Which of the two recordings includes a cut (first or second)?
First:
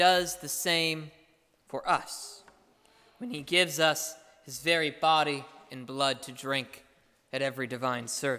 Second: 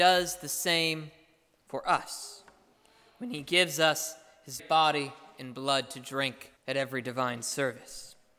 second